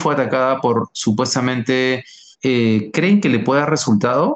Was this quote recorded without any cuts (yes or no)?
no